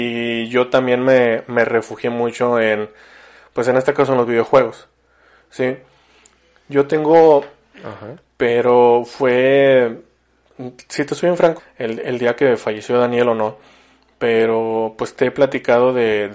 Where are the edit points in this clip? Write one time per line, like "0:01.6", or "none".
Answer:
0:07.7
0:11.6